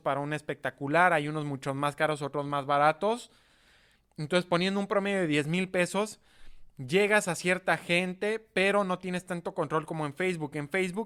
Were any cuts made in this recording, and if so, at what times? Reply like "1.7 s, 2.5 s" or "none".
none